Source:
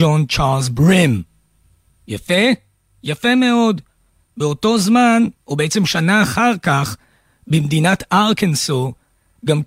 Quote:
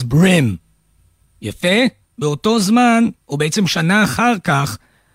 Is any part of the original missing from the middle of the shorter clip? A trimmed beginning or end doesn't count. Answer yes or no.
yes